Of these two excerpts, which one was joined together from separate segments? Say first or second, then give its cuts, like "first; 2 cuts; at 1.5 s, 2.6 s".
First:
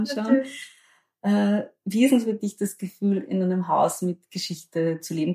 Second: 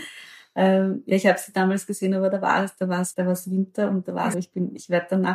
second; 2 cuts; at 3.1 s, 4.3 s